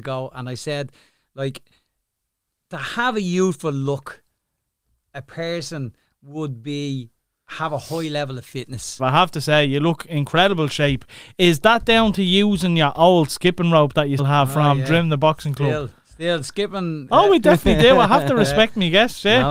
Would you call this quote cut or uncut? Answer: cut